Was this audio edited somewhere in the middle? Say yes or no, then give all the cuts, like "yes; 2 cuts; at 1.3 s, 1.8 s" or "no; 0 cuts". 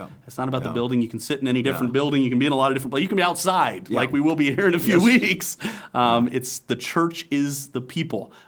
no; 0 cuts